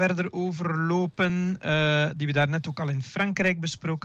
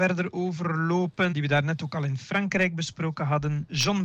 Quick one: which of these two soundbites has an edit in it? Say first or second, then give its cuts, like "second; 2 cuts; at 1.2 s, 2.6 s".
second; 1 cut; at 1.3 s